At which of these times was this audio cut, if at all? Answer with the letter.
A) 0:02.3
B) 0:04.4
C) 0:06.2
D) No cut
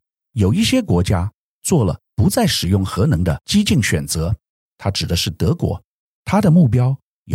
C